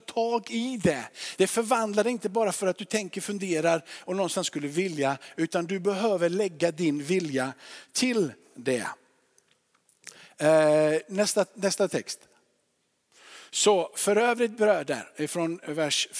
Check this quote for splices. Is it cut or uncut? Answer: uncut